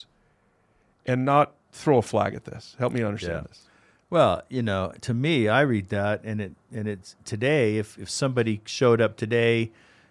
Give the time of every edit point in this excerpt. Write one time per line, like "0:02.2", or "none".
none